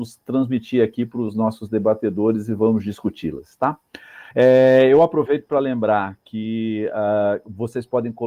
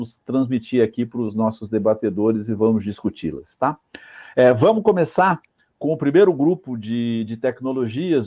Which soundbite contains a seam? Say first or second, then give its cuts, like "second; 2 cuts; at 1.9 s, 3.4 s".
first; 1 cut; at 4.3 s